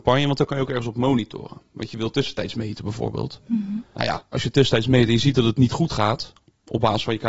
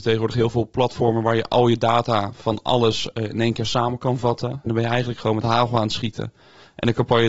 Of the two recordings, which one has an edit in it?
second; 1 cut; at 4.7 s

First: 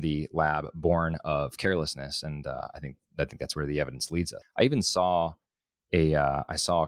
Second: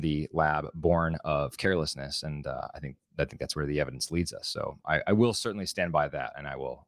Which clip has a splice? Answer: first; 1 cut; at 4.4 s

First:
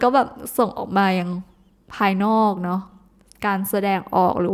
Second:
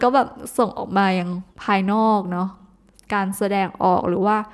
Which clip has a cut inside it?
second; 1 cut; at 1.5 s

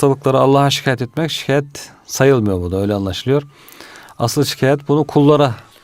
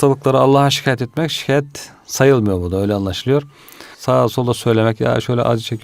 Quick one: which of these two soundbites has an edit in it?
second; 1 cut; at 3.9 s

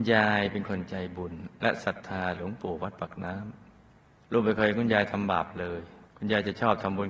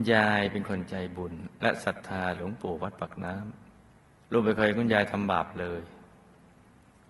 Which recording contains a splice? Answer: first; 1 cut; at 6.1 s

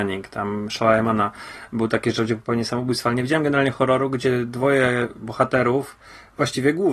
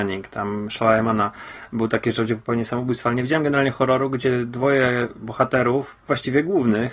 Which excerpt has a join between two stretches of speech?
second; 1 cut; at 6.0 s

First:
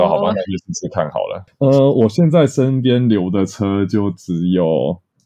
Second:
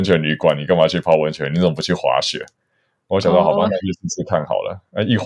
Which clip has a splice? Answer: first; 1 cut; at 1.5 s

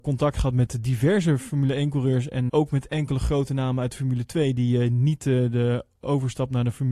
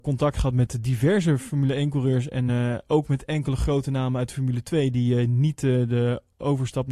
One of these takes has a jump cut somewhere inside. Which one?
first; 1 cut; at 2.5 s

